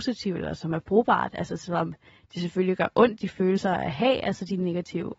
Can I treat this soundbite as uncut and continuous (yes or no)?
yes